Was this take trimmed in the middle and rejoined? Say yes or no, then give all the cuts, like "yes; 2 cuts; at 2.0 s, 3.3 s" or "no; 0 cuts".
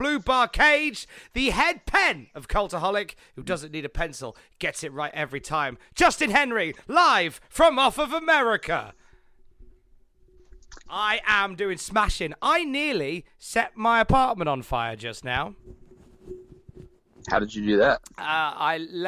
yes; 1 cut; at 10.9 s